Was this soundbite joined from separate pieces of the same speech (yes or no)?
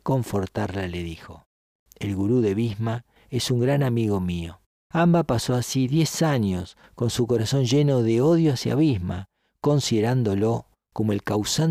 yes